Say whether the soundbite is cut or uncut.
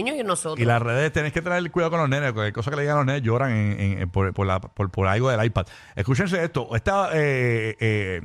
uncut